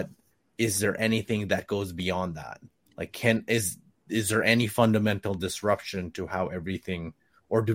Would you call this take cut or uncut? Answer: uncut